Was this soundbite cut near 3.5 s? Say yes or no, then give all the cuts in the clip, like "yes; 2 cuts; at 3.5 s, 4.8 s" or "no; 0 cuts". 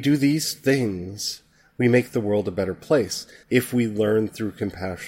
yes; 1 cut; at 3.5 s